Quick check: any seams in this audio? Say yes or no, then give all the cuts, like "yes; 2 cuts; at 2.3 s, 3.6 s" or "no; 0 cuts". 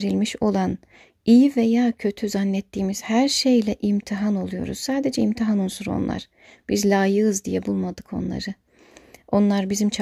no; 0 cuts